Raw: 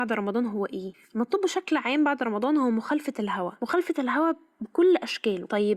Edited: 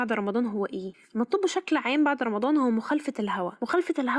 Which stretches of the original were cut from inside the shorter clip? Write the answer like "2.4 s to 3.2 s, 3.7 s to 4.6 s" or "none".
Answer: none